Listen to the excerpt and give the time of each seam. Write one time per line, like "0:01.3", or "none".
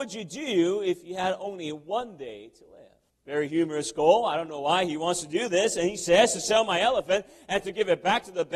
0:03.1